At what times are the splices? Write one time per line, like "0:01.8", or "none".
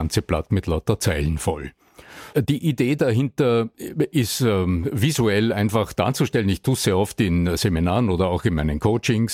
0:02.3